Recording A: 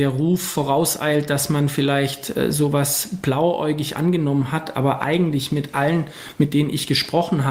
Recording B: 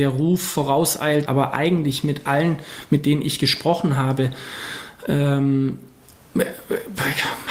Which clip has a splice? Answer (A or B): B